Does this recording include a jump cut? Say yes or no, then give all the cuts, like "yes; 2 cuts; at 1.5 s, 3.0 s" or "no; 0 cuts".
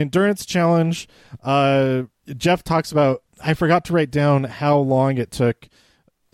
no; 0 cuts